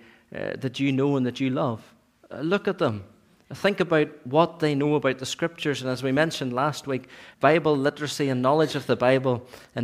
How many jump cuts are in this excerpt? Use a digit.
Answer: 1